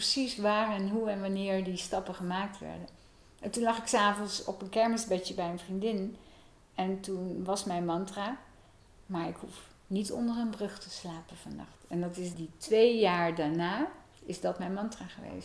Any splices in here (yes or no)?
yes